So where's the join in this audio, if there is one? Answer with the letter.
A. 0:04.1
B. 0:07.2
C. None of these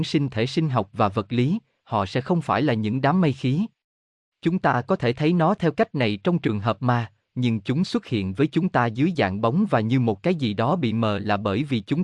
B